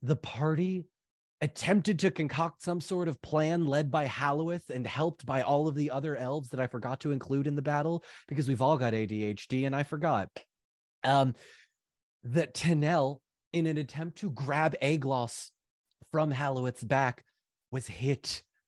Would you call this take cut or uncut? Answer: uncut